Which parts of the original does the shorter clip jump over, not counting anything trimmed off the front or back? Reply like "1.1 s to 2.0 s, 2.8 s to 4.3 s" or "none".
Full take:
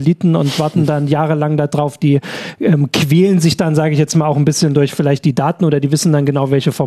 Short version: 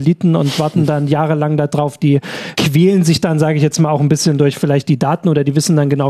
2.6 s to 2.9 s